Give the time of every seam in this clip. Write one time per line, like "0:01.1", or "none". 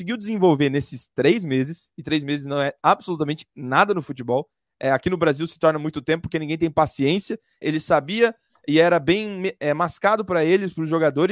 0:07.6